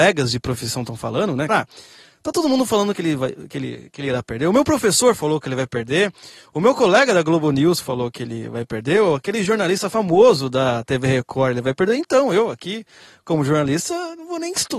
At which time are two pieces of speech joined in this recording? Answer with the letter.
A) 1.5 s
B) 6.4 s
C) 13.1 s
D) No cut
A